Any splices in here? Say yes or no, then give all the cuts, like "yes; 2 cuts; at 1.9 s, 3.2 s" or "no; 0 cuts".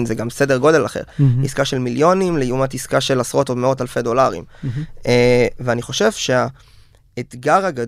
no; 0 cuts